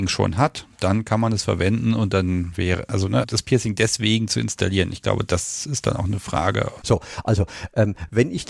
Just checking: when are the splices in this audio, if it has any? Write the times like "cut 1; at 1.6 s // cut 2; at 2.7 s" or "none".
cut 1; at 3.2 s // cut 2; at 6.8 s